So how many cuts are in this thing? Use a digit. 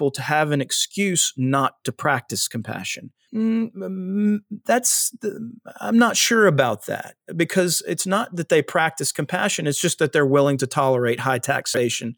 1